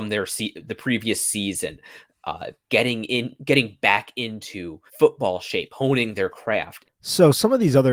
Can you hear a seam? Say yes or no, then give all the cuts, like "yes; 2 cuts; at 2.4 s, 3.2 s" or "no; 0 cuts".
yes; 3 cuts; at 2.6 s, 4.9 s, 6.8 s